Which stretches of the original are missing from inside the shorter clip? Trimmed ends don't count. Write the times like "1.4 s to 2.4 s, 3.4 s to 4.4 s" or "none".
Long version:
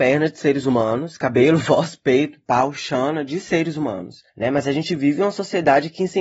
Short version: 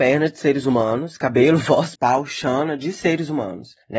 2.0 s to 2.4 s